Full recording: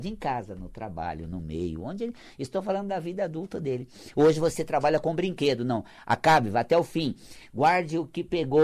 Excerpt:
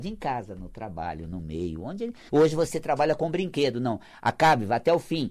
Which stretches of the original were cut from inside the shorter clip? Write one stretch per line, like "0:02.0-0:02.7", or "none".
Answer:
0:02.3-0:04.1